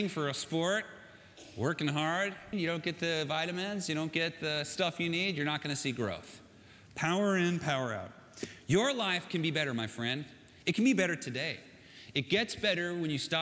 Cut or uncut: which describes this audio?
cut